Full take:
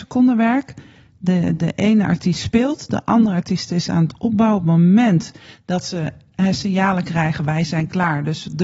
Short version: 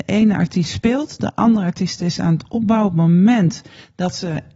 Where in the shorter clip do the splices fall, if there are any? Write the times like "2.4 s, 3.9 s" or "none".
none